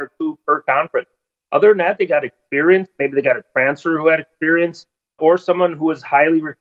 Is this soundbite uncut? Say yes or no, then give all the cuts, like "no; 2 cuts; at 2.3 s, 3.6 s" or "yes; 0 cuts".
no; 1 cut; at 5.2 s